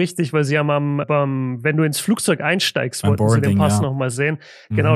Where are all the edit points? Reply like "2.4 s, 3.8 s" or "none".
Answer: 1.0 s

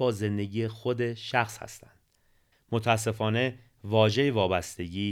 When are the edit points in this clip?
2.5 s

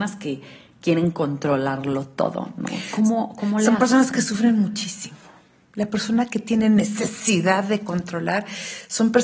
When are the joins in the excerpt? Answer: none

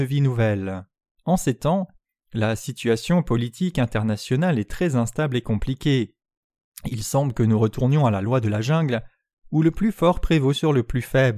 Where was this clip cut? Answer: 1.2 s, 6.7 s

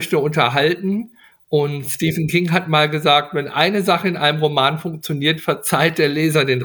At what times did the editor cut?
none

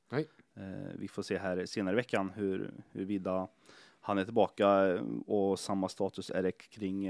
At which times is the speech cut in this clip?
none

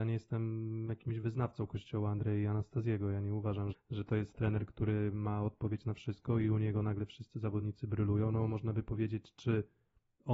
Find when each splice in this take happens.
3.7 s

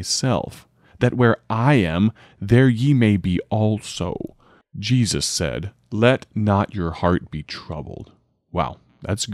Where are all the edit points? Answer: 4.6 s

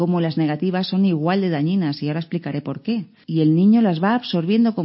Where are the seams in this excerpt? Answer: 3.2 s

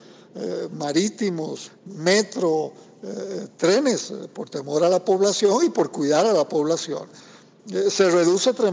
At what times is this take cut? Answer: 1.7 s

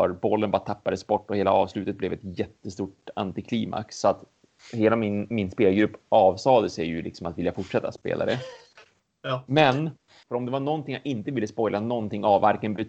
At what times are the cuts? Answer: 10.2 s

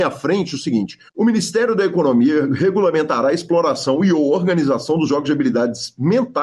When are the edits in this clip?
1.1 s

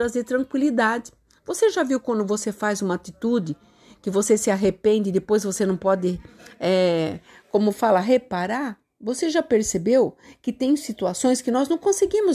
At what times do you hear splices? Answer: none

